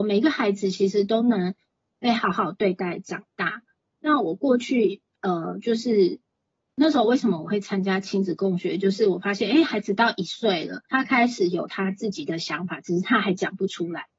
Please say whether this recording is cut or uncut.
cut